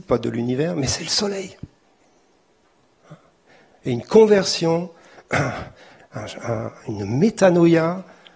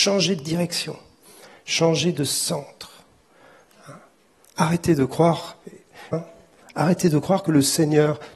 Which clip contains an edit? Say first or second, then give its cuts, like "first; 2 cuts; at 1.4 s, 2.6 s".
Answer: second; 2 cuts; at 4.5 s, 6.1 s